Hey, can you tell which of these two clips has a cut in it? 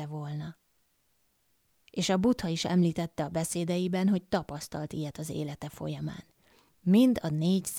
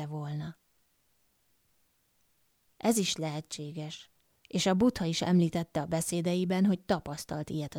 first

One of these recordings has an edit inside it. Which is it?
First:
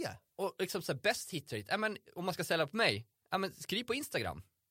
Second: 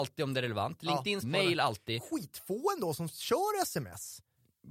second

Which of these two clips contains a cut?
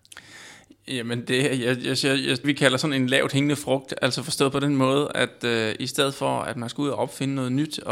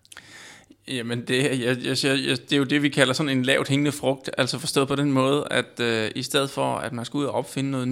first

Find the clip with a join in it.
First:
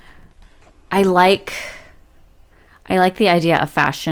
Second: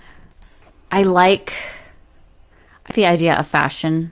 second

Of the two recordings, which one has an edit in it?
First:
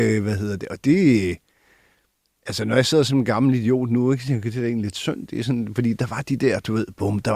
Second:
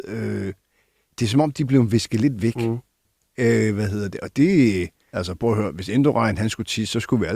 second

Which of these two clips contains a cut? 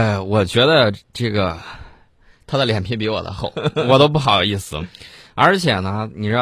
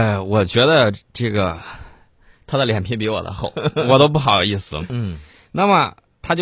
second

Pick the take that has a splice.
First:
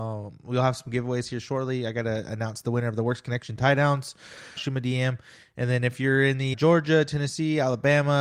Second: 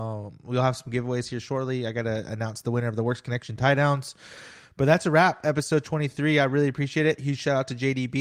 first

